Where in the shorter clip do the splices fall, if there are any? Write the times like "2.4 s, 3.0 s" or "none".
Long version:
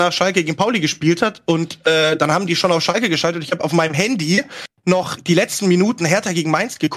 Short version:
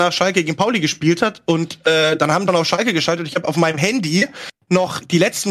2.5 s